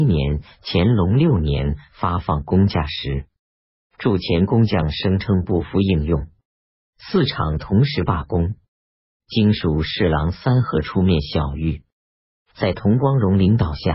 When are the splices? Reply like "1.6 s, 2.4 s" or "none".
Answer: none